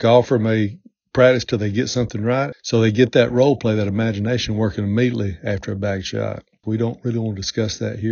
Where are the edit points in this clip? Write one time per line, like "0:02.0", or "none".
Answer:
0:02.5
0:06.6